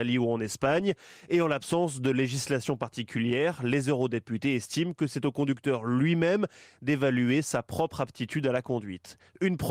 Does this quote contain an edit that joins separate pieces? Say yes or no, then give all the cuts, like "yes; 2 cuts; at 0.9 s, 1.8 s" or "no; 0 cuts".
no; 0 cuts